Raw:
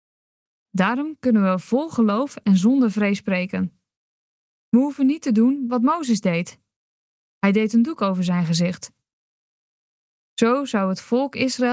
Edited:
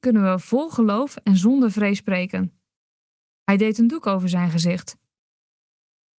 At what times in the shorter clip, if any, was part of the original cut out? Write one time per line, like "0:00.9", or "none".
0:03.3